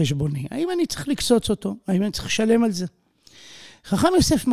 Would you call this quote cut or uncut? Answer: uncut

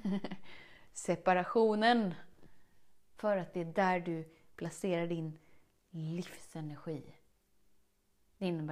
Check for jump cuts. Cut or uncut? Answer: uncut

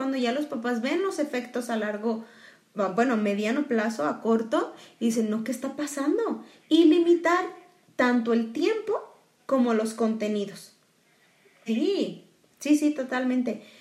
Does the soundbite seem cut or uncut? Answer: cut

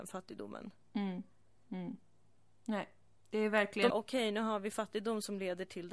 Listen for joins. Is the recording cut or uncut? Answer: cut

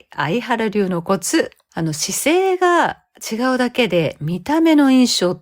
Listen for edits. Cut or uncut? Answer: cut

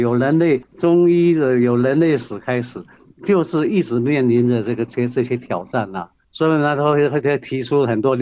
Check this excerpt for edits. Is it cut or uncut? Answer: uncut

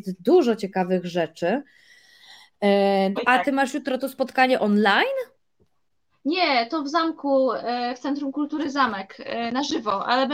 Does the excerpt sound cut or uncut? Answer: cut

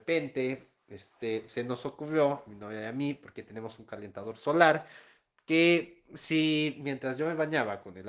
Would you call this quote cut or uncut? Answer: uncut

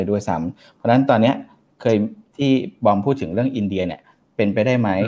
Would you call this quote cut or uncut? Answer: uncut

